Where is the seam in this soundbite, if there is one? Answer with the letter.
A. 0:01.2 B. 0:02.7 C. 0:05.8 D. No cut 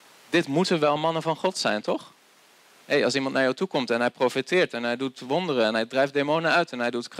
D